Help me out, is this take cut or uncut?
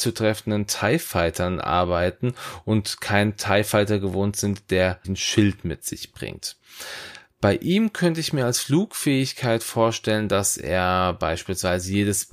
cut